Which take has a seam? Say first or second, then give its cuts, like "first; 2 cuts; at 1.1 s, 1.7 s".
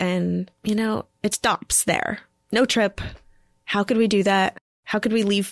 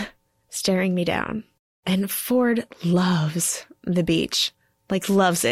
first; 1 cut; at 1.3 s